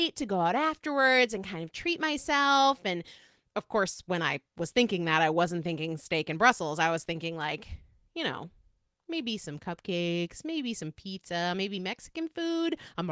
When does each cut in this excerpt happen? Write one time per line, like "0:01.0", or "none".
none